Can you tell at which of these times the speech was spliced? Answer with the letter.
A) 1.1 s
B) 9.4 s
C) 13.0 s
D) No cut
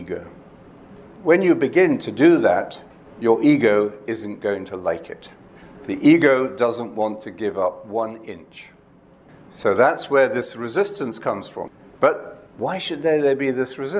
D